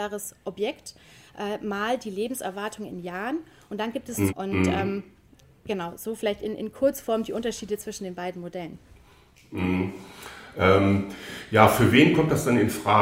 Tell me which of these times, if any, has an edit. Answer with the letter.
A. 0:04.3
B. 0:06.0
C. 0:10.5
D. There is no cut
A